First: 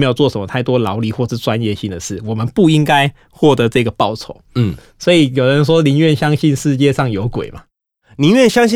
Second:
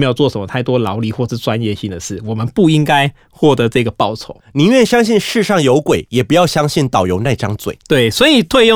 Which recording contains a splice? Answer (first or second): second